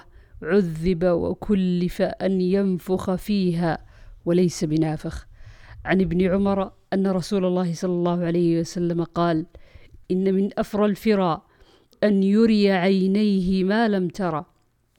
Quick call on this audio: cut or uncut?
cut